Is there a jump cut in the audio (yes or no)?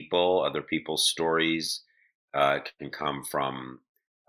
no